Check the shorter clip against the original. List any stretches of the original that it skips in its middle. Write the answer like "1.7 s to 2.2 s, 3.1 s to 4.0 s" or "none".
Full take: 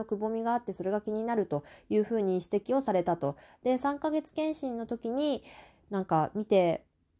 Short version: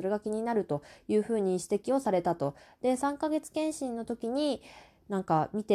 none